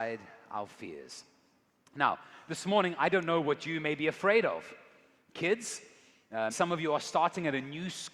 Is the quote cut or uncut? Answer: cut